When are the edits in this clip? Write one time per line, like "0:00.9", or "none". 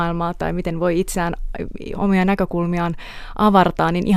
0:01.9

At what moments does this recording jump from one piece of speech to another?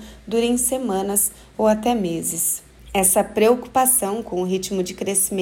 0:02.8

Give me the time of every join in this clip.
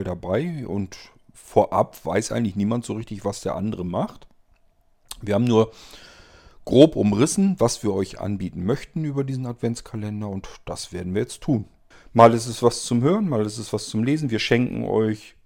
0:11.9

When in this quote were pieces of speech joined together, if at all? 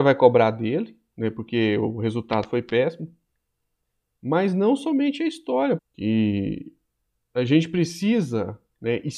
0:05.8

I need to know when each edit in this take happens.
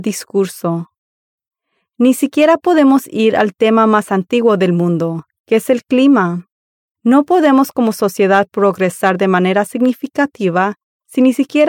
0:06.8

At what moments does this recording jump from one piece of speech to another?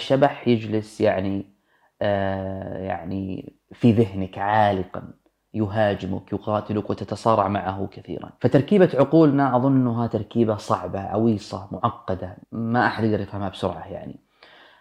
0:12.4

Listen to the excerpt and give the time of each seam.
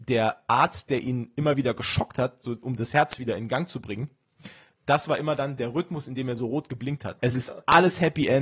0:07.2

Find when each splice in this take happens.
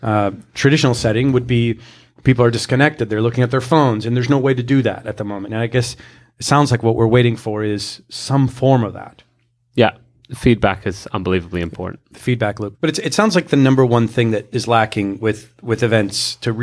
0:12.7

